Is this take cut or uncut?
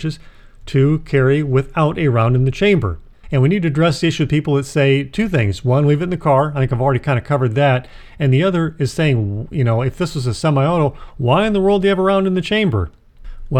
cut